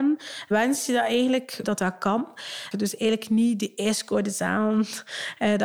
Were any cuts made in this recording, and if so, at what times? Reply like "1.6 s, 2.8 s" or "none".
1.6 s, 2.7 s